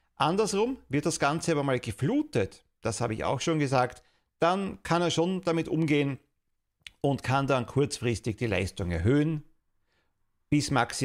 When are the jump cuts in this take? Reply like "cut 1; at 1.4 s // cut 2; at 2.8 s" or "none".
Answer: none